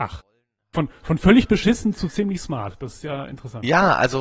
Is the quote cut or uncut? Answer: uncut